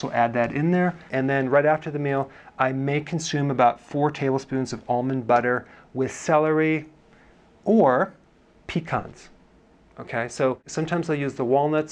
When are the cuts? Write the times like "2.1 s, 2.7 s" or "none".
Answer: 1.1 s